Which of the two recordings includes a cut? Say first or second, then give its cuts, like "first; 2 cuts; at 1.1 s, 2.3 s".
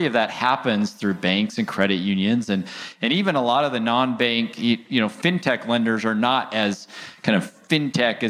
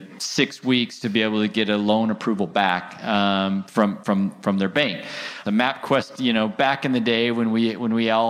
second; 1 cut; at 5.4 s